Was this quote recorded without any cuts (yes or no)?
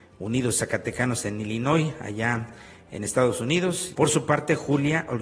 no